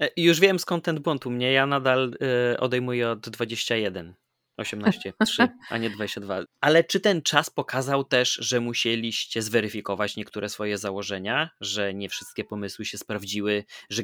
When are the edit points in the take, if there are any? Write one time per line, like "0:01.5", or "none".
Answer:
0:06.5

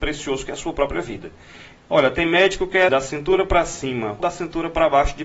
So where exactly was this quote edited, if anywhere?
0:01.8
0:02.9
0:04.2

